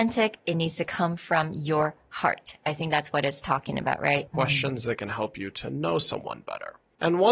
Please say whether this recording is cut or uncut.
cut